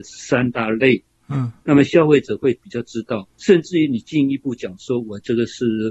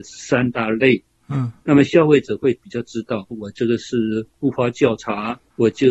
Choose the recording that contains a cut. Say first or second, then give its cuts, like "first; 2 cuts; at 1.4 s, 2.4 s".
second; 1 cut; at 3.3 s